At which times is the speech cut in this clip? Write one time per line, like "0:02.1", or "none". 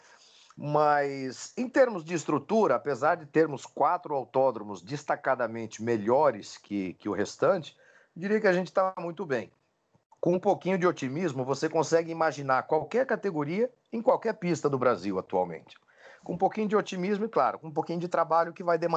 none